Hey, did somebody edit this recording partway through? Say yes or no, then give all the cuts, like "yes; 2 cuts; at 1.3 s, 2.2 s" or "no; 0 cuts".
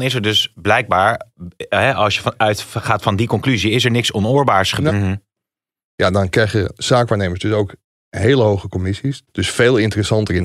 yes; 2 cuts; at 4.9 s, 9.3 s